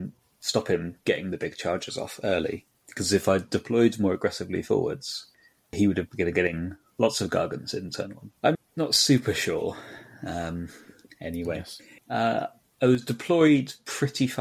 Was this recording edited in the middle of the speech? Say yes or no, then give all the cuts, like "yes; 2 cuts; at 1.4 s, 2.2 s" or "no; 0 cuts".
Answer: yes; 2 cuts; at 8.5 s, 12.0 s